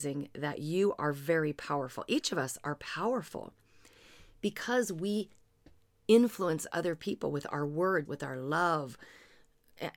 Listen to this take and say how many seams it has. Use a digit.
1